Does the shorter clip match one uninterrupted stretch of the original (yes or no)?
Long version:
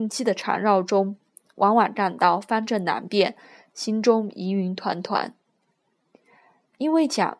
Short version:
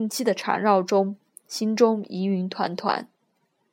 no